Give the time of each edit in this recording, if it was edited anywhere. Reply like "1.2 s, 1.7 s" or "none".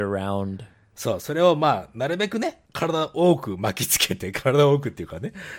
2.7 s